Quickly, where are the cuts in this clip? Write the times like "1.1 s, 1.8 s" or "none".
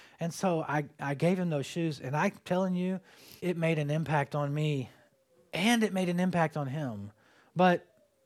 3.4 s